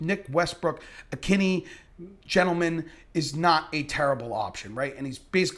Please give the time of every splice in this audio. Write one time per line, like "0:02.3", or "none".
0:02.2

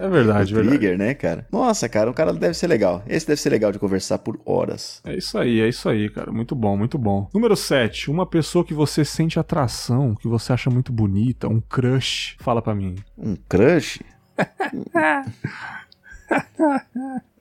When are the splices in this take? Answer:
none

